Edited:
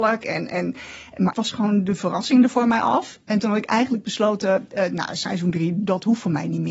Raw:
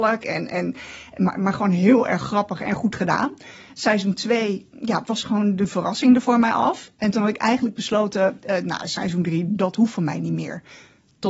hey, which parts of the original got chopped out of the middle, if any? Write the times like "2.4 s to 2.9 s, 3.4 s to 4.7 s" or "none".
1.3 s to 5.0 s